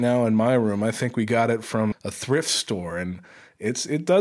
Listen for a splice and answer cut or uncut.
cut